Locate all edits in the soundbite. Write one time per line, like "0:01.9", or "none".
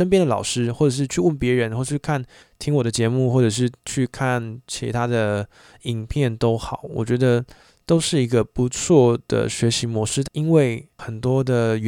0:10.2